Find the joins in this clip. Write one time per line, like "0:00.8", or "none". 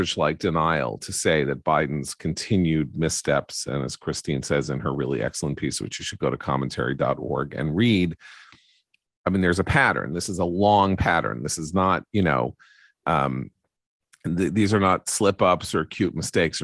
none